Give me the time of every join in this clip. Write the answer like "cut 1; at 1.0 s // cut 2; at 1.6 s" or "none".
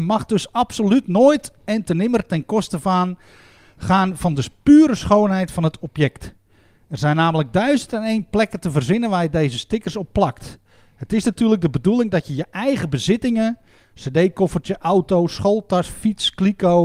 none